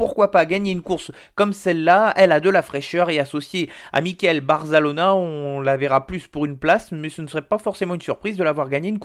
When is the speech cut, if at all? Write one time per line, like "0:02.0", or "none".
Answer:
none